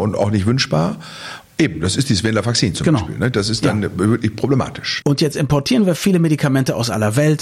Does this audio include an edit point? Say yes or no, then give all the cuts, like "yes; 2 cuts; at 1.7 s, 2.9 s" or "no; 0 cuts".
yes; 2 cuts; at 1.5 s, 5.0 s